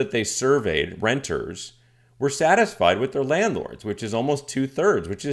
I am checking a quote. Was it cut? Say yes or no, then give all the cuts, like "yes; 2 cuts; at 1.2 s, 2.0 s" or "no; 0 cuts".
no; 0 cuts